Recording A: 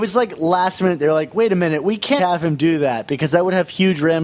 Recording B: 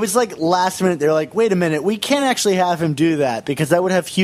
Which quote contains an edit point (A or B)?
A